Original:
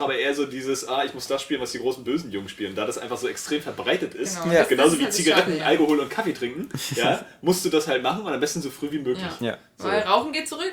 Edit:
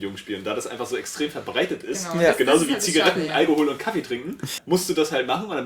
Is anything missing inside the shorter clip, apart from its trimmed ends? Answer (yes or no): yes